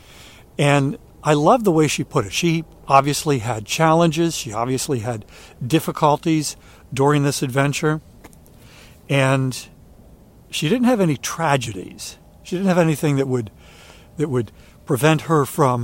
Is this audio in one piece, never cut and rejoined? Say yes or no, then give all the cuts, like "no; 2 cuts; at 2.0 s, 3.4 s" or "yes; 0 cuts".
yes; 0 cuts